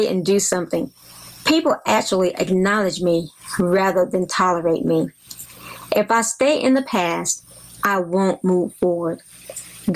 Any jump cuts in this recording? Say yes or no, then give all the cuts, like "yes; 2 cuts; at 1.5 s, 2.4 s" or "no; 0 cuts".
no; 0 cuts